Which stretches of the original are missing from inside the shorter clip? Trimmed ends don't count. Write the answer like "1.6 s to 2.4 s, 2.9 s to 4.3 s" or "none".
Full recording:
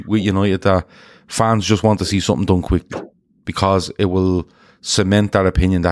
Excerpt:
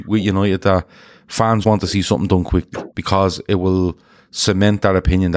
1.6 s to 1.8 s, 3.1 s to 3.4 s